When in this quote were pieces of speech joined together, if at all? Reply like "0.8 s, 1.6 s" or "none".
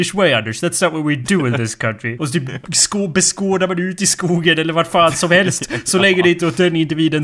2.2 s